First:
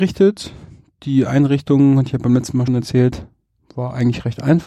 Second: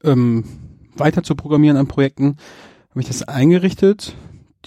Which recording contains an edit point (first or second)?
first